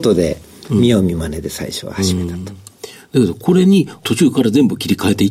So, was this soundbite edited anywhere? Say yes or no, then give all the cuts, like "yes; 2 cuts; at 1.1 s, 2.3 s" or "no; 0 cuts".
no; 0 cuts